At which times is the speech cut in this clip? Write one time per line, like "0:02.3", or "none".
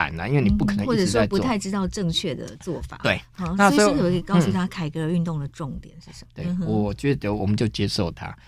0:06.3